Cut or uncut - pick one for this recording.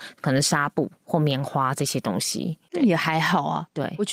cut